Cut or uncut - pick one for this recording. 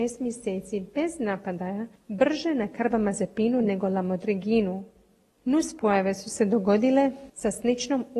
uncut